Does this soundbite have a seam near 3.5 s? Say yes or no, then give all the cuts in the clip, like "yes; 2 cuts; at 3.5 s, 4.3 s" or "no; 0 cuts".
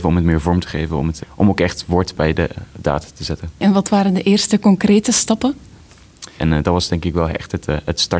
no; 2 cuts; at 1.2 s, 6.4 s